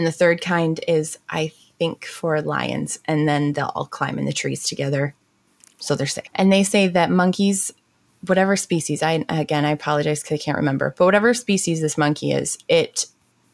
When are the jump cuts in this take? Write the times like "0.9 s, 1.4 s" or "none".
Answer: 6.3 s